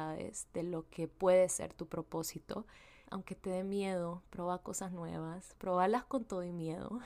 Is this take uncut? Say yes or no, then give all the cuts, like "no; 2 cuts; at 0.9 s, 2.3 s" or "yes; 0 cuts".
no; 1 cut; at 3.0 s